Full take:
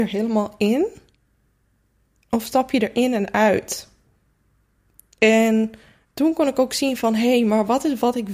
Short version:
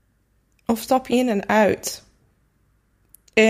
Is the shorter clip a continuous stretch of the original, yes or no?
no